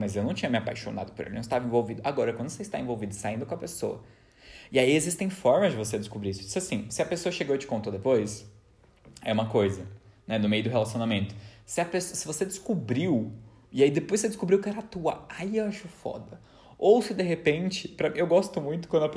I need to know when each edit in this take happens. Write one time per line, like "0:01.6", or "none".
none